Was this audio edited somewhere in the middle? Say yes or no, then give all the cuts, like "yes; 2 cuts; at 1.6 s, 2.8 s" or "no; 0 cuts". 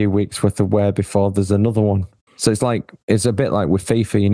no; 0 cuts